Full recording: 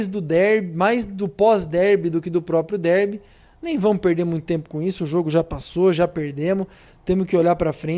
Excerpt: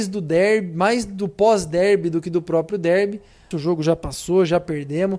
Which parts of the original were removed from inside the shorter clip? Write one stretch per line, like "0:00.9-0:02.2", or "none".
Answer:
0:03.5-0:05.0